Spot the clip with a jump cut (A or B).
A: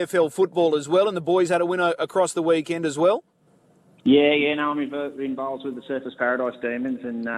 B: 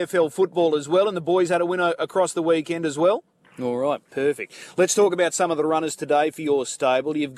B